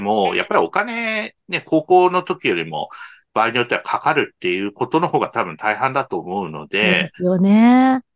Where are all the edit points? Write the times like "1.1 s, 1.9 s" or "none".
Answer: none